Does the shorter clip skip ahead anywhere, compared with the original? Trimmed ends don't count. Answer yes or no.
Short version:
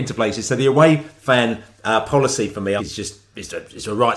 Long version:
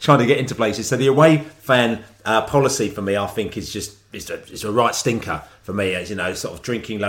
yes